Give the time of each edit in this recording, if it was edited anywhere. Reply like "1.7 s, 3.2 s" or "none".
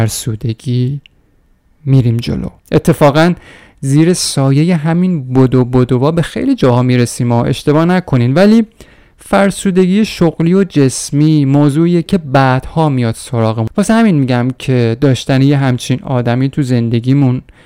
2.6 s